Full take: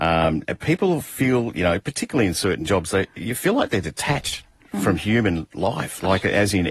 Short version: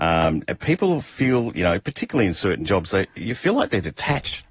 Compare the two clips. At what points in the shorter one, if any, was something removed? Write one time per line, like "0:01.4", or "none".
none